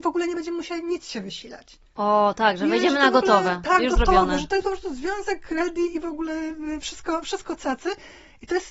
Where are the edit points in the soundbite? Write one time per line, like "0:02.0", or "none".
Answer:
none

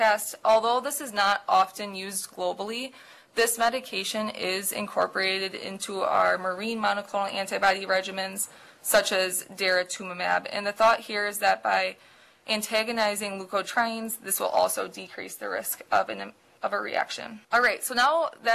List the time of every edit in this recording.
0:17.4

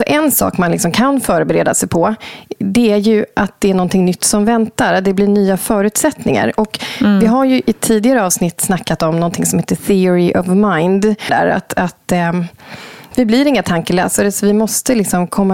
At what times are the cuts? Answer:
0:11.3
0:13.1

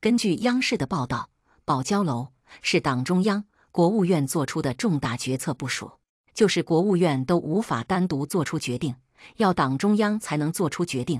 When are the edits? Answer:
0:06.2

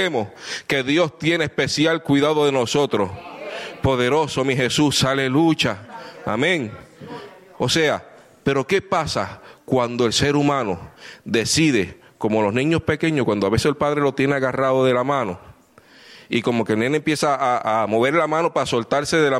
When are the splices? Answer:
0:07.5

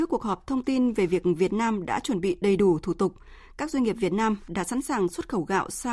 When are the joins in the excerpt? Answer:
none

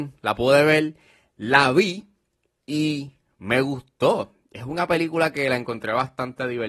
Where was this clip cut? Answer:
none

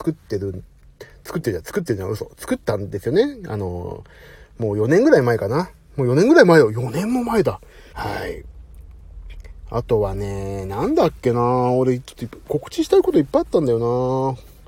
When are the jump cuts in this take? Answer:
0:07.9

